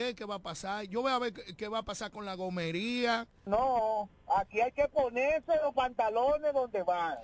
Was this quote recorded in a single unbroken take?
no; 1 cut; at 3.5 s

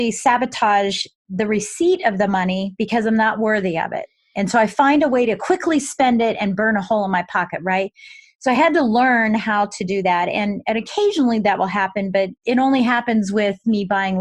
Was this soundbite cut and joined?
no; 0 cuts

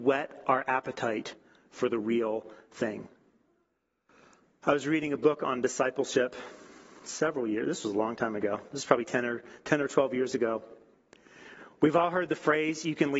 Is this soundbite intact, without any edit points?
yes; 0 cuts

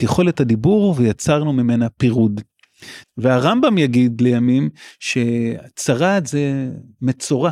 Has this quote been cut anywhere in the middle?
yes; 1 cut; at 3.0 s

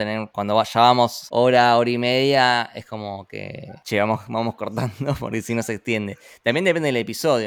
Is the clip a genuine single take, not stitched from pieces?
yes; 0 cuts

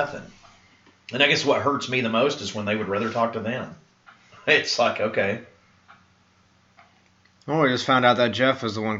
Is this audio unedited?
yes; 0 cuts

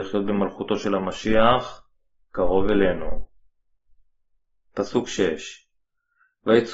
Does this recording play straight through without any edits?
yes; 0 cuts

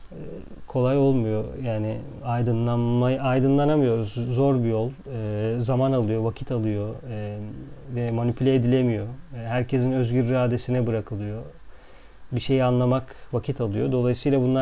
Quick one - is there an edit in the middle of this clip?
no; 0 cuts

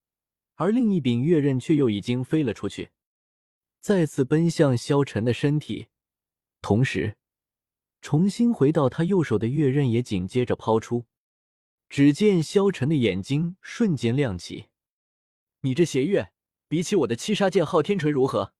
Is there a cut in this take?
yes; 1 cut; at 11.8 s

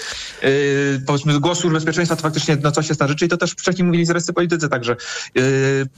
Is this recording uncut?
yes; 0 cuts

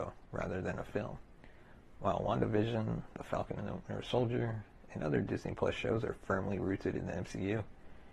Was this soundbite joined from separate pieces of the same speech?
no; 0 cuts

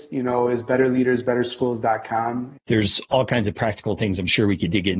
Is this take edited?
yes; 1 cut; at 2.5 s

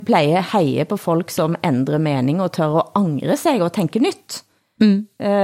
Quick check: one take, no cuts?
yes; 0 cuts

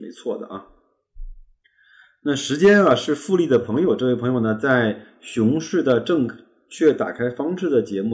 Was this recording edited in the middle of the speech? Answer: no; 0 cuts

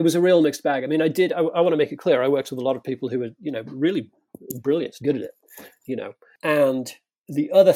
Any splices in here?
yes; 1 cut; at 5.0 s

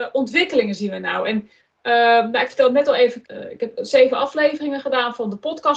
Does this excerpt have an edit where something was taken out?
yes; 1 cut; at 3.2 s

